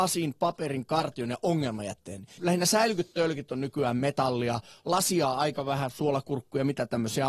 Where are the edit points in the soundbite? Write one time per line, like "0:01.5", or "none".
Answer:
0:02.4